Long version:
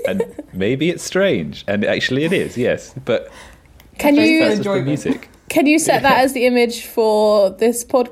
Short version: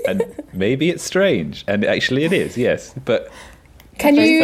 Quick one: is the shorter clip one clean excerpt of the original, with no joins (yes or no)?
yes